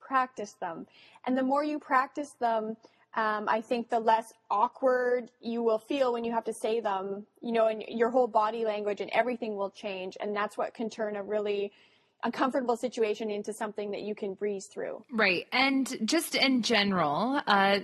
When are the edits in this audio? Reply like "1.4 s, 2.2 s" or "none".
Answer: none